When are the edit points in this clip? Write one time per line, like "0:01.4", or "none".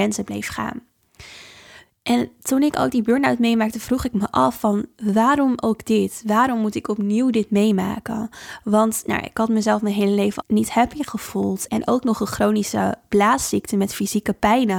0:10.4
0:11.7